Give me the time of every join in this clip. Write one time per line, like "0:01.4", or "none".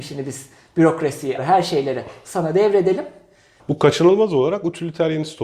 0:01.4
0:03.6